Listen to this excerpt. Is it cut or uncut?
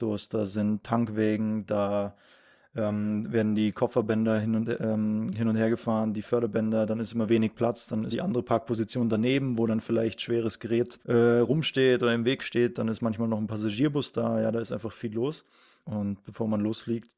cut